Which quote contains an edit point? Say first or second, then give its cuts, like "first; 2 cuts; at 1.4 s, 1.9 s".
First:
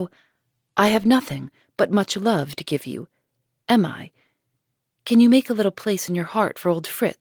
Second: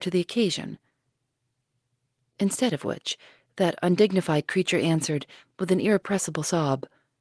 first; 1 cut; at 3.6 s